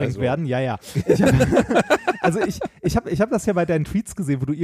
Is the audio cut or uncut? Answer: uncut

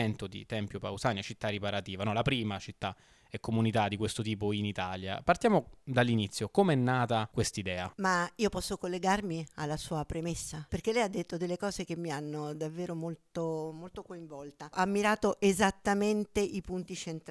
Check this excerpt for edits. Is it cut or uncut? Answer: uncut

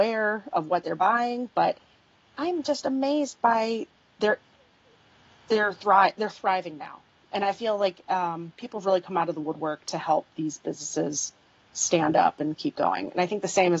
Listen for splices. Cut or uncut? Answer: uncut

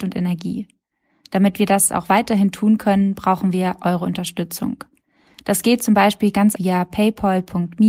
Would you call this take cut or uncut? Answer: cut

